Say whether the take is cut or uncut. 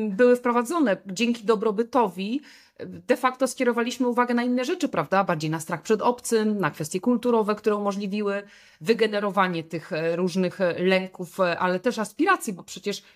uncut